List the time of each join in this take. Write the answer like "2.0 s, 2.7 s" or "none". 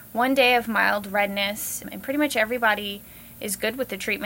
none